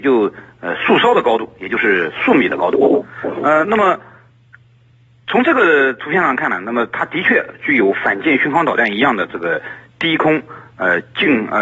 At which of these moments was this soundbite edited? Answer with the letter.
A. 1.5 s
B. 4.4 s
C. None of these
C